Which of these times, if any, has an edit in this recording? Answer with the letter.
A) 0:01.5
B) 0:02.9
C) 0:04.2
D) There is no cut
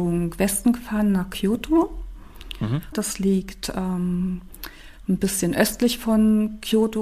B